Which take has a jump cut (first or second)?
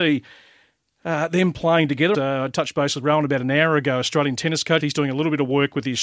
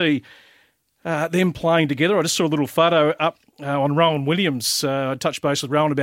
first